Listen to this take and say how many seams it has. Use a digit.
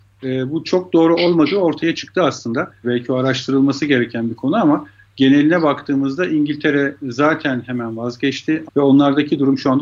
2